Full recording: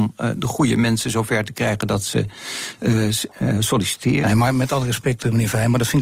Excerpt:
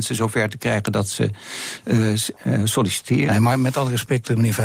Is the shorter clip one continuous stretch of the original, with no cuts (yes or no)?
yes